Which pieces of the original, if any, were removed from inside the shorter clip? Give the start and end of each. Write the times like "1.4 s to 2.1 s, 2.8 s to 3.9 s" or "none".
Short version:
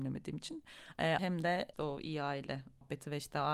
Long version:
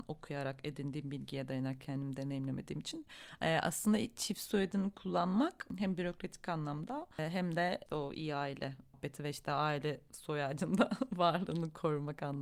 3.6 s to 7.3 s

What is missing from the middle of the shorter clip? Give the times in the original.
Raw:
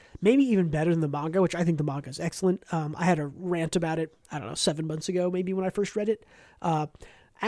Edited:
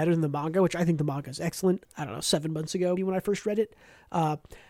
2.6 s to 4.2 s, 5.3 s to 5.5 s

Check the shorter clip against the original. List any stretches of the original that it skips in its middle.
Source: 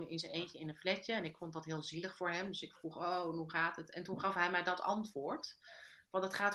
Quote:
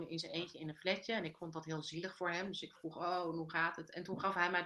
none

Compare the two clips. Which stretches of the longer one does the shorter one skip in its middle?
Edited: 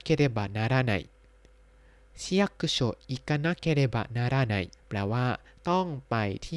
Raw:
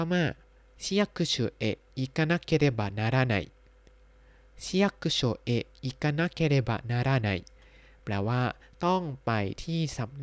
5.4 s to 5.7 s, 7.5 s to 7.9 s

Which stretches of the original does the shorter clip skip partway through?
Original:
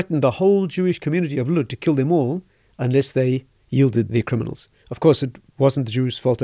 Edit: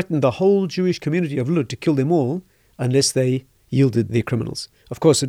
none

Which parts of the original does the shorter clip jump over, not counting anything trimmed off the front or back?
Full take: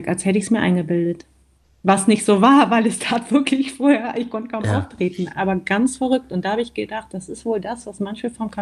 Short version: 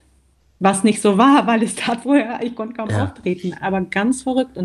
3.2 s to 3.8 s

